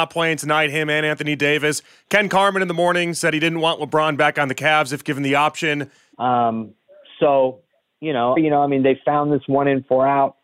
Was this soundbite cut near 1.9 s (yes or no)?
no